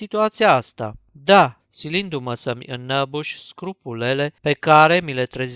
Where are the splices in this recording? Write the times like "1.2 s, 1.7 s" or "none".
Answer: 1.6 s, 4.4 s

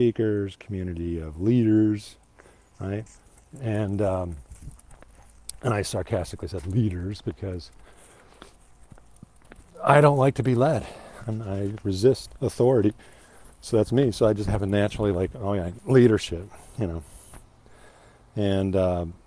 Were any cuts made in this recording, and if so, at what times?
15.8 s

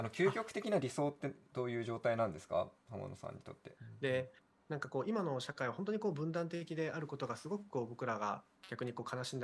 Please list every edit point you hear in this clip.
3.8 s

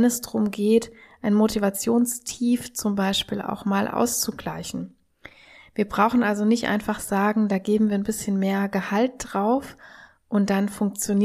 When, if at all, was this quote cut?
none

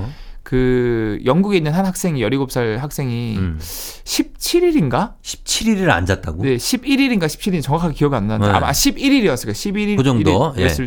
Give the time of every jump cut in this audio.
10.0 s

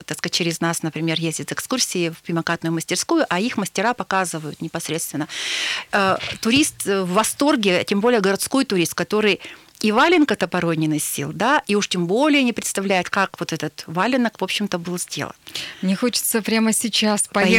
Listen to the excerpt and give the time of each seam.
none

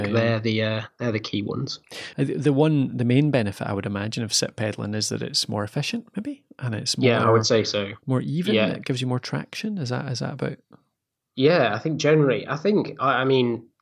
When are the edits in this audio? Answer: 2.1 s

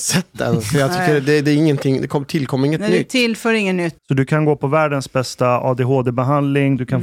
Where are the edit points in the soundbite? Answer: 4.0 s

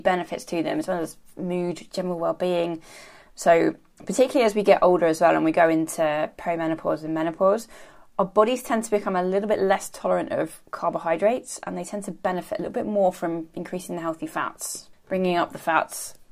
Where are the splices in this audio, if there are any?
3.2 s, 14.9 s

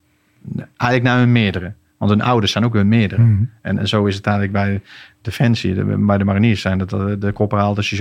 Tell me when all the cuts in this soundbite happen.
none

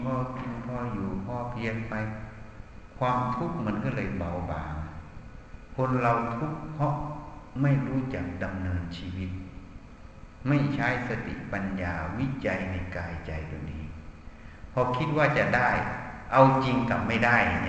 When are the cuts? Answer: none

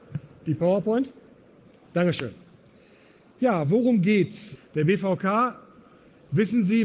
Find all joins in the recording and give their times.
4.6 s

